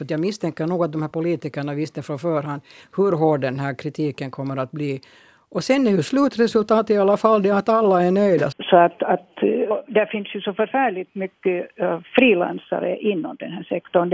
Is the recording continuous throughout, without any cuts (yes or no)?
no